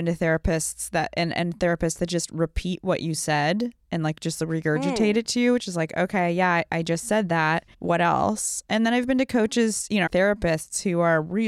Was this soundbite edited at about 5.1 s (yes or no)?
no